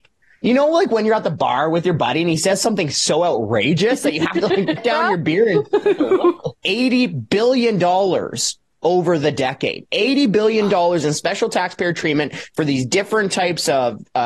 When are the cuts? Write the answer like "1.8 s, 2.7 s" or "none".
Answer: 4.8 s, 6.5 s